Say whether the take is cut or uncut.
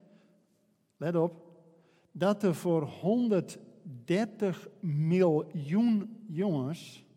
uncut